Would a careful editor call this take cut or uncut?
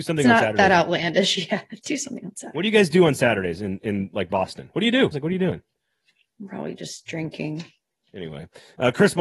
cut